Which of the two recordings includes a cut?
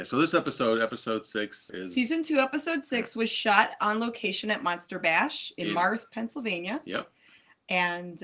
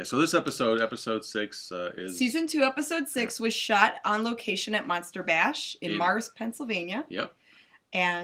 first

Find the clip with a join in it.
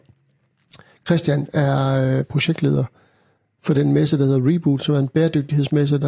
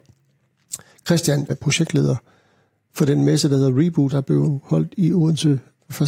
second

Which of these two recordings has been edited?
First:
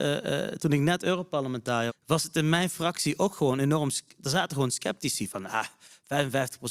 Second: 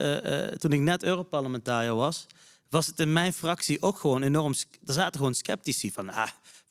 first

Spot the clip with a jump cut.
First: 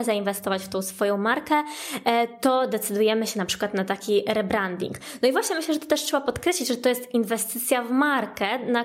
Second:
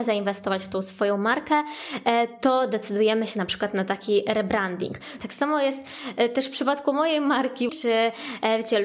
second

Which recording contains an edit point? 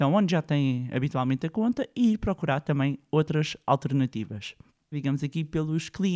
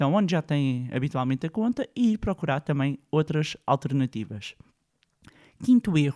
first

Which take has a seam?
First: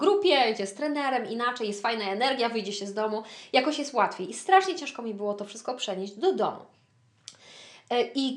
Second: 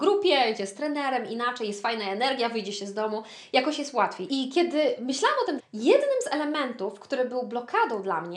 second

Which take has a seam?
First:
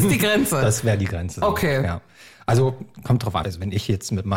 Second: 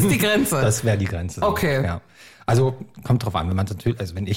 first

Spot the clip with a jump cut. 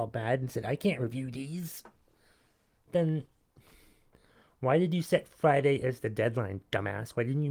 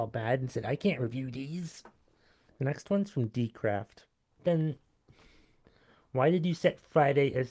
second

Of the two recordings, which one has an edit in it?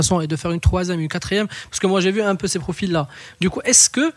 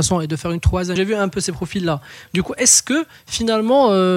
second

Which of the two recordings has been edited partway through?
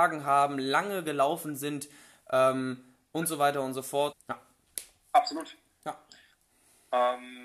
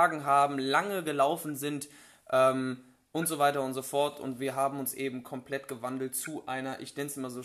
first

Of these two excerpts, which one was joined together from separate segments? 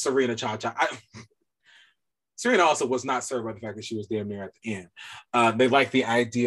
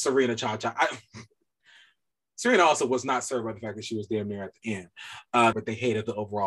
second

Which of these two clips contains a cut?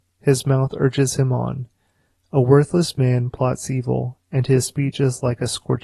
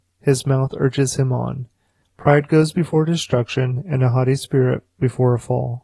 second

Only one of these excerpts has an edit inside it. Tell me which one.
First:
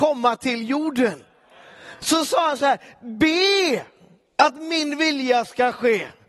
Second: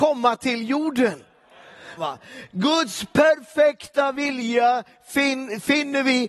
second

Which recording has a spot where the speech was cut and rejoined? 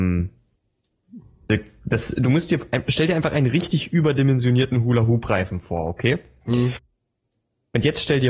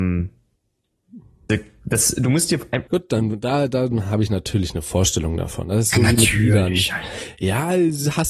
second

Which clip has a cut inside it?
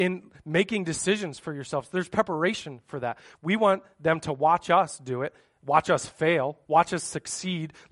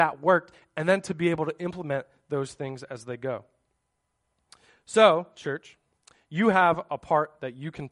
first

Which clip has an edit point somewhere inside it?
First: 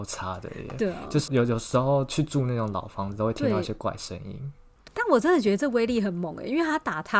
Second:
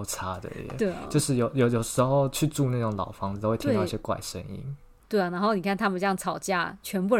first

